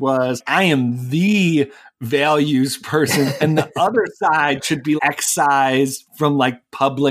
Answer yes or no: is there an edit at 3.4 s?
no